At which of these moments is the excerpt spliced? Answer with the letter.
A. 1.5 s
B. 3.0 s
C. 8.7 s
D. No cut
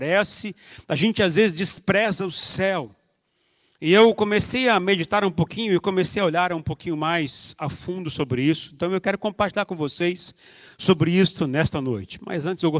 D